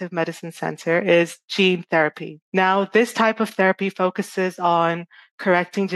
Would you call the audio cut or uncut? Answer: uncut